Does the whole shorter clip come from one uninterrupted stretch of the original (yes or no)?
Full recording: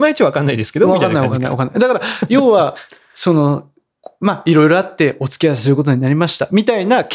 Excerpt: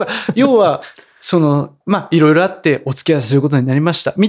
no